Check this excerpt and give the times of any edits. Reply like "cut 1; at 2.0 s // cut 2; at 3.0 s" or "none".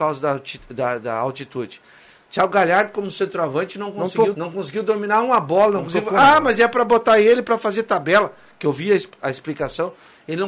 cut 1; at 4.3 s